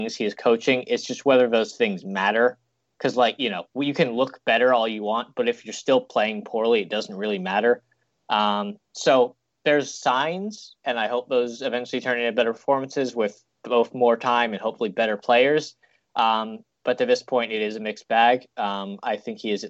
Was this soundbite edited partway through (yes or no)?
no